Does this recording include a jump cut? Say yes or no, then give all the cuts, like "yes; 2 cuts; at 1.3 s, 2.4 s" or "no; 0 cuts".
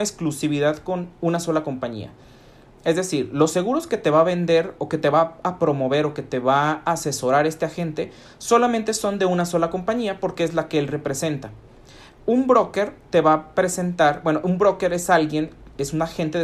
no; 0 cuts